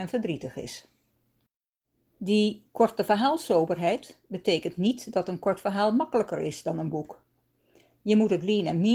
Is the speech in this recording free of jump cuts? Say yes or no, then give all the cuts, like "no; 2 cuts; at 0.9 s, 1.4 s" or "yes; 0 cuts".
yes; 0 cuts